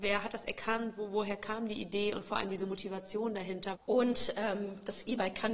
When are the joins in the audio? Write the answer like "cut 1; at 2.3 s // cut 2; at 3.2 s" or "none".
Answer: cut 1; at 3.8 s